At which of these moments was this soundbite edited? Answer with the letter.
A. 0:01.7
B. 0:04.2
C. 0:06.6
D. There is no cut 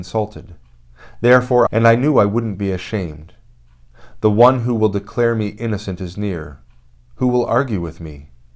A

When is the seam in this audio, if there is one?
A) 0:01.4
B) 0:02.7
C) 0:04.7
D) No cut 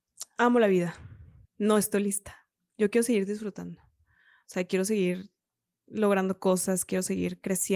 A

